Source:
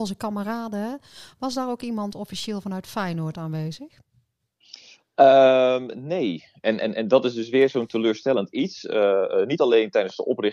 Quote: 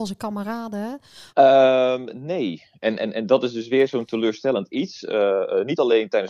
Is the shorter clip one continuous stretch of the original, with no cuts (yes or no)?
no